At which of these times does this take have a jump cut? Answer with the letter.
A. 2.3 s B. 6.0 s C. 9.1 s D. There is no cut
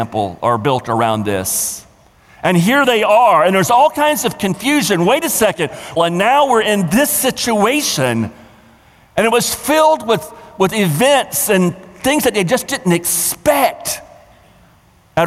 B